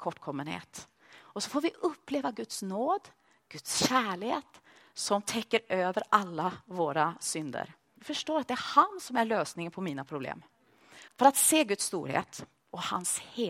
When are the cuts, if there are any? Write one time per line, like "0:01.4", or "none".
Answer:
0:08.0
0:11.1